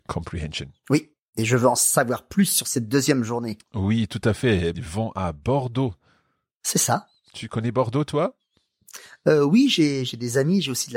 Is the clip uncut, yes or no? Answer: no